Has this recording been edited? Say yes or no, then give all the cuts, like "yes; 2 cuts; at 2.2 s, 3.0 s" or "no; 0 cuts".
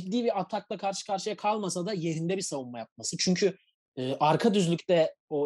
no; 0 cuts